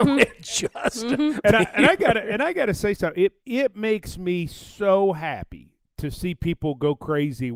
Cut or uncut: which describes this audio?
cut